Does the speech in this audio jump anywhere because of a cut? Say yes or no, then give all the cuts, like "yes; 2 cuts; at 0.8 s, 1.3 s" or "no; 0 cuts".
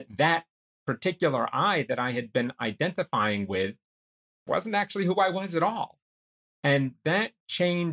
no; 0 cuts